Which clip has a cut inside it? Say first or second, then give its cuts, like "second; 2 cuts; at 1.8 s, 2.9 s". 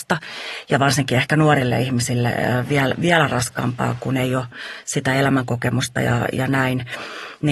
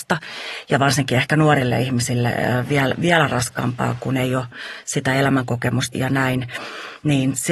second; 1 cut; at 5.9 s